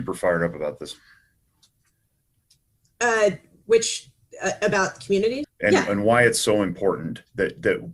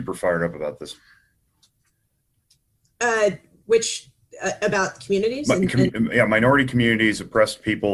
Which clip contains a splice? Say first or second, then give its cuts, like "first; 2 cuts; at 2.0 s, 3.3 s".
first; 1 cut; at 5.4 s